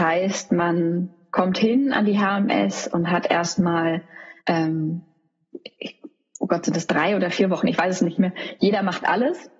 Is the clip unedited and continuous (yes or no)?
no